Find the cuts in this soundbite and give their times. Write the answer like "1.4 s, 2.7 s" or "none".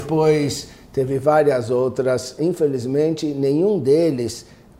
2.4 s